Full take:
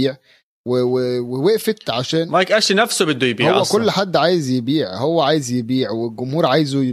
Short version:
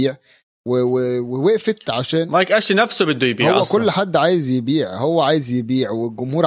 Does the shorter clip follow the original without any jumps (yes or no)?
yes